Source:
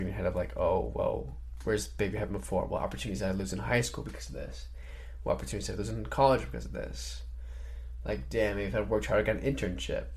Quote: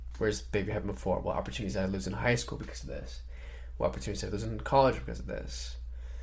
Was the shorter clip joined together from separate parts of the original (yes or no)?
no